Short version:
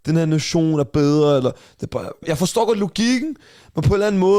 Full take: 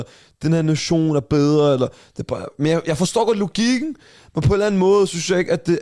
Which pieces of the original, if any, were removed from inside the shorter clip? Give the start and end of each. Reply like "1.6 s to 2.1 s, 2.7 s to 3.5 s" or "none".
2.6 s to 2.8 s